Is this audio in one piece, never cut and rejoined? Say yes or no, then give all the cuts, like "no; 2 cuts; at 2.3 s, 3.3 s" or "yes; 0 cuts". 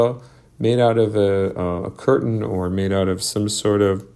yes; 0 cuts